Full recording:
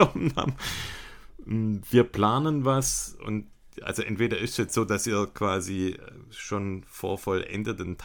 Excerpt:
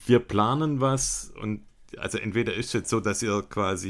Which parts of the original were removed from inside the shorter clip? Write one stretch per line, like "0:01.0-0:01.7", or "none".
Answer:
none